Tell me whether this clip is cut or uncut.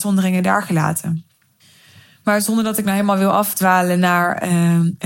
uncut